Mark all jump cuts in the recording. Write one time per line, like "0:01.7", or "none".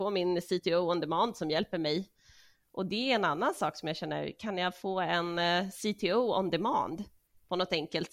0:02.6